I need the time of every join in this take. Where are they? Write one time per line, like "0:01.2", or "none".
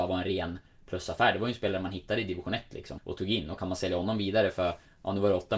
0:03.0